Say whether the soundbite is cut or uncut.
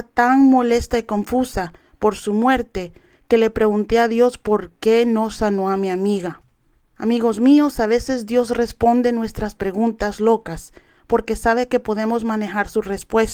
uncut